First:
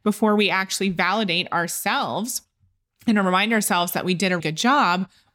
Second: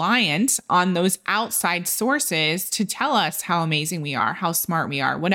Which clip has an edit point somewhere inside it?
first; 1 cut; at 4.4 s

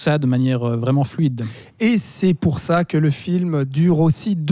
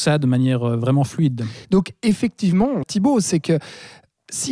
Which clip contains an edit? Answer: second; 2 cuts; at 1.6 s, 2.8 s

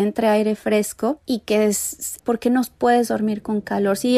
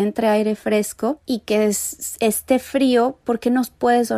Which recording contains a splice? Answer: first; 1 cut; at 2.2 s

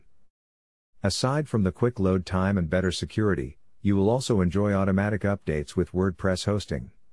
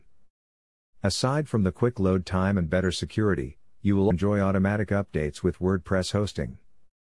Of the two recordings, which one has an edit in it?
second; 1 cut; at 4.1 s

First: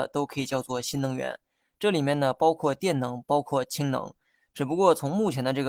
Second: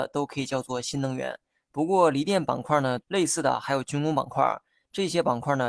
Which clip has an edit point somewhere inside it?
second; 2 cuts; at 1.5 s, 3.0 s

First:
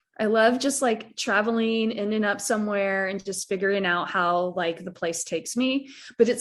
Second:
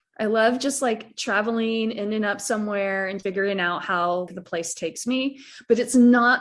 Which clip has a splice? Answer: second; 2 cuts; at 3.2 s, 4.3 s

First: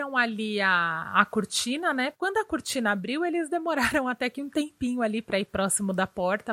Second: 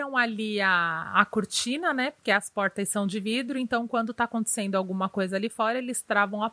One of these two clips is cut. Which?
first; 1 cut; at 2.1 s

